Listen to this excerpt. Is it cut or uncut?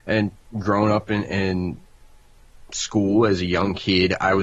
uncut